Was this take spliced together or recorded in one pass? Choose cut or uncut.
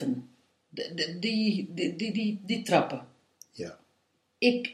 uncut